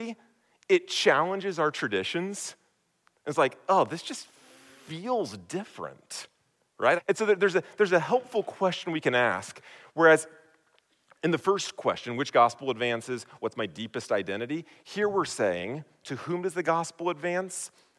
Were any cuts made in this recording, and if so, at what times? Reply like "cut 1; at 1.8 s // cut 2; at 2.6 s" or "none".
cut 1; at 7.0 s